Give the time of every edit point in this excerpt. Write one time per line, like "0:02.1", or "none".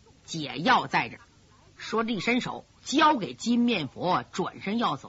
0:01.5
0:02.7